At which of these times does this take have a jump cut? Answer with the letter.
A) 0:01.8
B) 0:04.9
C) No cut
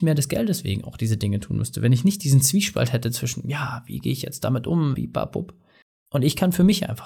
B